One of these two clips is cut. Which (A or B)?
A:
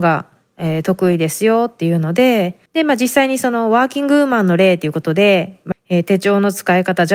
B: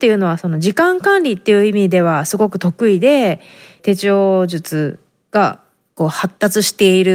A